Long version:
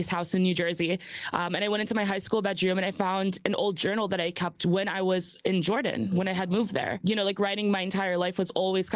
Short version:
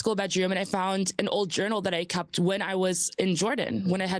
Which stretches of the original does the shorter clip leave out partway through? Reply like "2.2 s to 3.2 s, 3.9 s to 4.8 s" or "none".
none